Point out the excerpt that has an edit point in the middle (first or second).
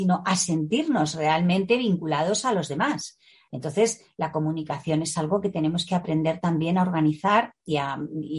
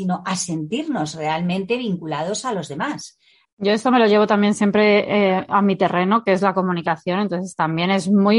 second